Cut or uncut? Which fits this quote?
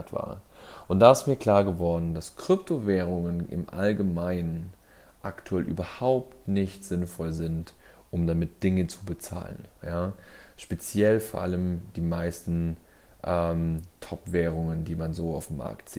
uncut